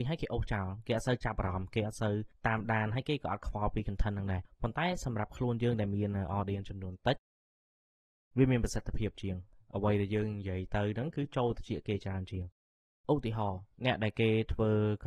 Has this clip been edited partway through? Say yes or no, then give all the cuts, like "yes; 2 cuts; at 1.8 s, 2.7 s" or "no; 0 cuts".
yes; 1 cut; at 13.7 s